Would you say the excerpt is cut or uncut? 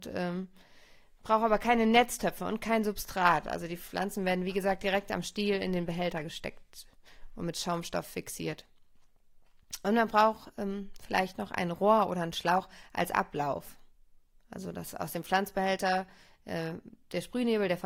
uncut